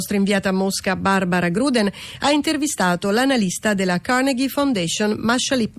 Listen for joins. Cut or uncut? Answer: uncut